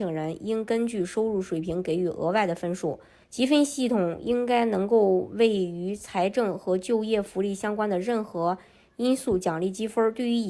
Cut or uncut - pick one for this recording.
cut